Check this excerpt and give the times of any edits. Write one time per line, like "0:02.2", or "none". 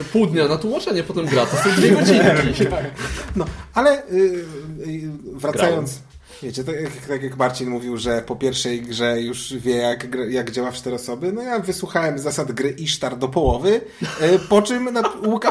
none